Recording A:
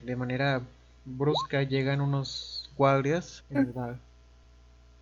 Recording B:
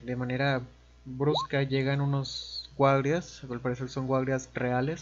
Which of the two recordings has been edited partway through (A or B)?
A